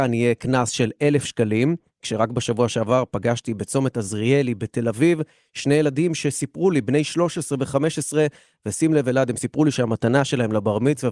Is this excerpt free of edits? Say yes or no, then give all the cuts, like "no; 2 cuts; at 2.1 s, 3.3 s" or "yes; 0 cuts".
yes; 0 cuts